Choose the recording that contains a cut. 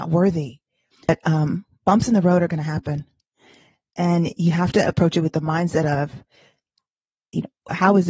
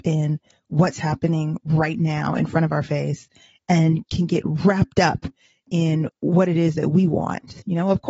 first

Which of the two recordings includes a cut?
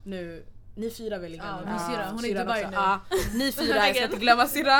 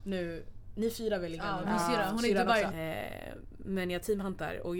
second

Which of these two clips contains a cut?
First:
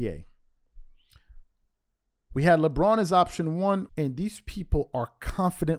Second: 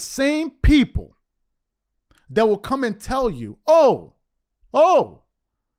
first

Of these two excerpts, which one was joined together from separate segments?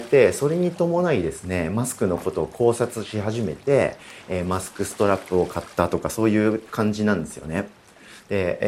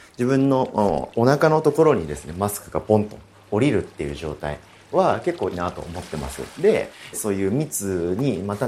second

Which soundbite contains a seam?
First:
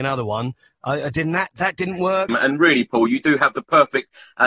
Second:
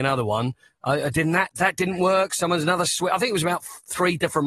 first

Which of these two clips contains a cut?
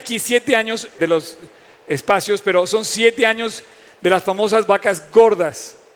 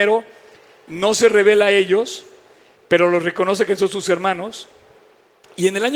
first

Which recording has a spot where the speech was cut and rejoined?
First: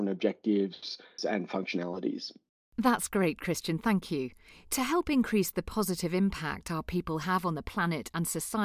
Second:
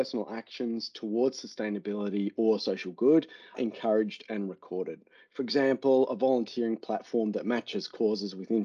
first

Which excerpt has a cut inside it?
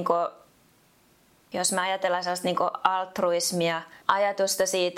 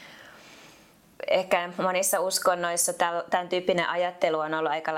first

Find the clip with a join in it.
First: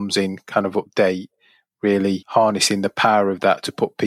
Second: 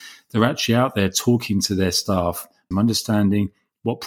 second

